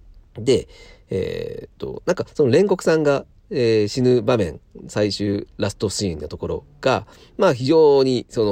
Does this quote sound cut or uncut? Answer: uncut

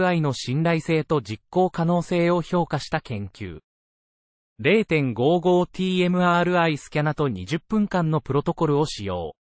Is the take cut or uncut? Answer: uncut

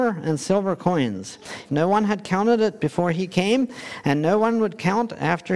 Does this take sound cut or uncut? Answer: cut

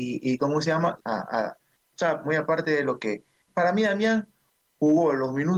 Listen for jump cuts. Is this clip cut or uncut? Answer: cut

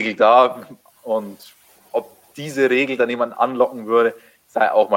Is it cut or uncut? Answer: uncut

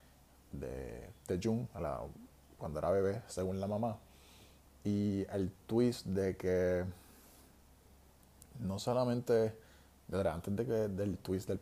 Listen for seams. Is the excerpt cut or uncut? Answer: uncut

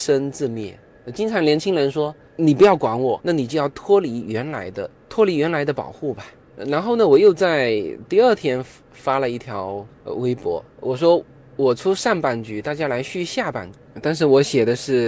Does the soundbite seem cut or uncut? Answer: cut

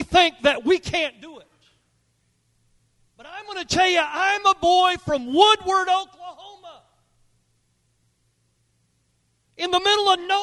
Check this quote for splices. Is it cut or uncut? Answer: uncut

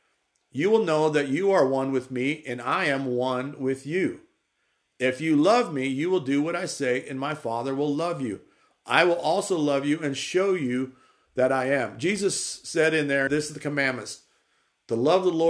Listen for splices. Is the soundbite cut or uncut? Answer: cut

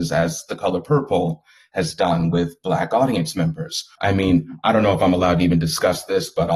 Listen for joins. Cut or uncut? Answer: cut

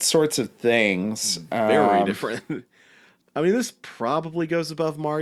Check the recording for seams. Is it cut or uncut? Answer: cut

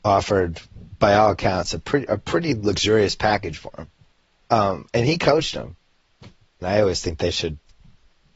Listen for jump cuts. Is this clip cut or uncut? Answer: cut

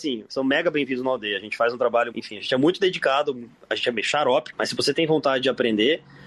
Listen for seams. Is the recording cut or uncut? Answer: cut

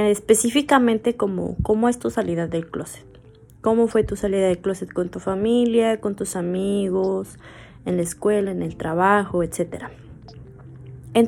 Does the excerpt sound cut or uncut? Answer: uncut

